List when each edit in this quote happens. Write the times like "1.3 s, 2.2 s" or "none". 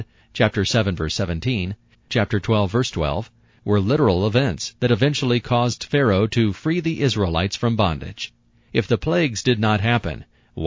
1.9 s